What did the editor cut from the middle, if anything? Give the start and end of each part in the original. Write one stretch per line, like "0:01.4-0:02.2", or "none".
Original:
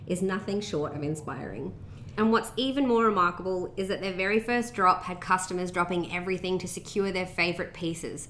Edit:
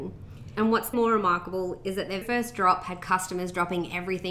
0:02.5-0:02.9
0:04.1-0:04.4